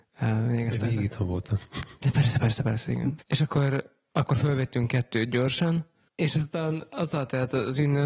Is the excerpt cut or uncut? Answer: cut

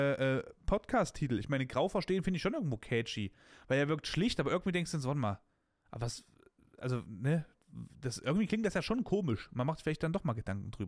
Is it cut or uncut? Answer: uncut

